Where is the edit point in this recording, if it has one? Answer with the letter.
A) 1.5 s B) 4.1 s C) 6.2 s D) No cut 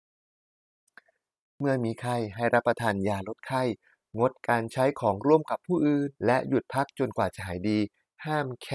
C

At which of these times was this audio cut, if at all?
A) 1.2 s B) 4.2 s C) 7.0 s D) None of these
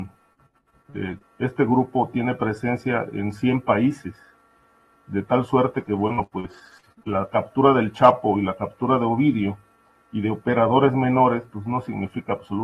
A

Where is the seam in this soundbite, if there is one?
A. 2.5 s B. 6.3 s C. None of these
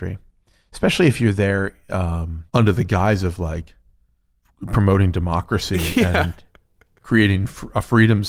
A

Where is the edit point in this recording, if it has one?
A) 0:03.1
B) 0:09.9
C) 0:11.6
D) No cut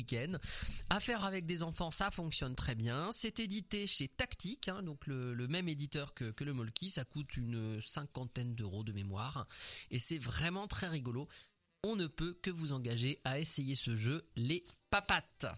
D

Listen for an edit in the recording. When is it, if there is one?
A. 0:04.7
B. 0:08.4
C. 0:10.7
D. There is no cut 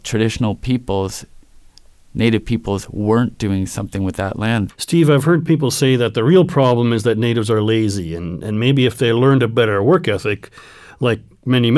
A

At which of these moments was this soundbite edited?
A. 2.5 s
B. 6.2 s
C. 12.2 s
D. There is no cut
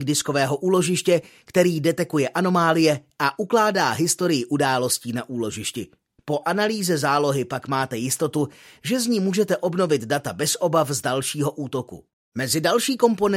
B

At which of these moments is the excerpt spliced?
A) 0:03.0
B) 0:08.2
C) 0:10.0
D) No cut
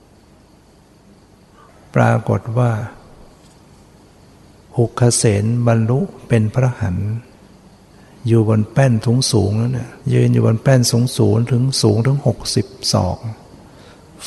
C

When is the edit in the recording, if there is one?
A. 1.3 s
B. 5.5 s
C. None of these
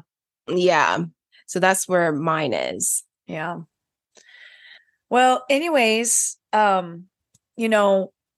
C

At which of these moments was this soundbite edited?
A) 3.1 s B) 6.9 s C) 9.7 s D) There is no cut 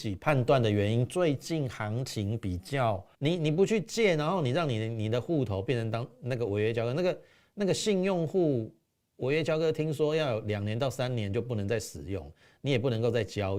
A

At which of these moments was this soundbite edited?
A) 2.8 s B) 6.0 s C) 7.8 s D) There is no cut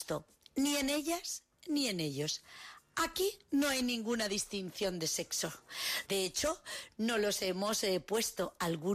B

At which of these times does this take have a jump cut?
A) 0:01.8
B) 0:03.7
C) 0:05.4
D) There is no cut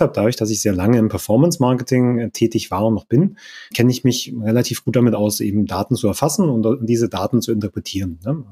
B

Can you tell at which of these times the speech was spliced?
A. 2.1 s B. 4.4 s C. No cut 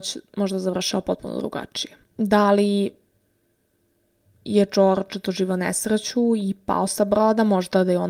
C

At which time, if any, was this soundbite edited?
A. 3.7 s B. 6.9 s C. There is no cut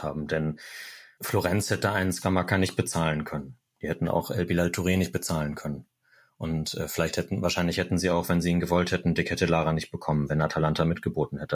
C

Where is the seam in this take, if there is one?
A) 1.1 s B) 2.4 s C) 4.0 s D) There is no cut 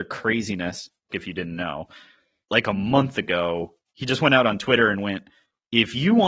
A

